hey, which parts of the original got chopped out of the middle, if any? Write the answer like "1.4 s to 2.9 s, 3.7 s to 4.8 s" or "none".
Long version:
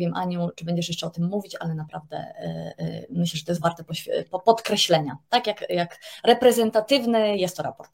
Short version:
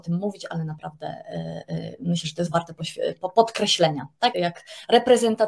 5.4 s to 5.7 s